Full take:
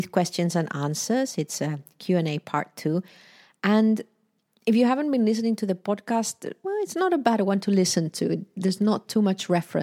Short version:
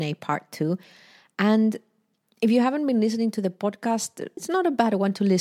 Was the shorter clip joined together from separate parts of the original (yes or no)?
yes